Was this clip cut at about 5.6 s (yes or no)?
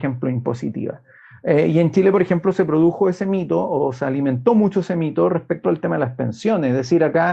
yes